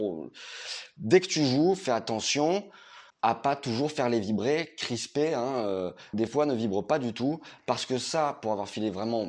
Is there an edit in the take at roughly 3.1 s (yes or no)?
yes